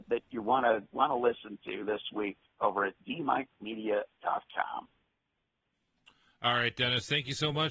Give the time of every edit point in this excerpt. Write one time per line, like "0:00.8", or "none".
none